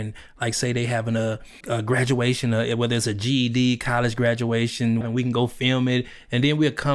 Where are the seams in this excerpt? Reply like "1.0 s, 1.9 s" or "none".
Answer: 1.6 s, 5.0 s